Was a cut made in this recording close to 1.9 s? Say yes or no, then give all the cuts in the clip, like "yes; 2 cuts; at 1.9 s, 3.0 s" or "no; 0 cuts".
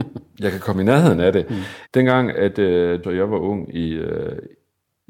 yes; 2 cuts; at 1.9 s, 3.0 s